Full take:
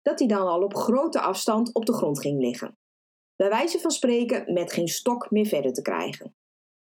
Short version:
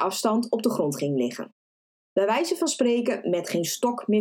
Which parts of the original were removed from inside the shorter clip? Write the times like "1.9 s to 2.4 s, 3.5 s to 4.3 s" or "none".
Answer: none